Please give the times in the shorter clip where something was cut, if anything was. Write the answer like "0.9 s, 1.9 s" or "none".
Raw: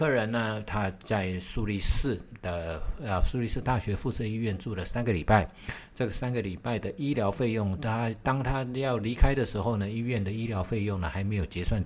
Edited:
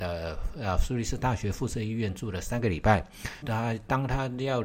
3.4 s